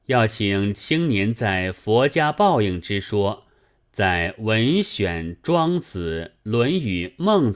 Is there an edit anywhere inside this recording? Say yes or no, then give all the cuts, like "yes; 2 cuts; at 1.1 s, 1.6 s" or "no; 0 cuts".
no; 0 cuts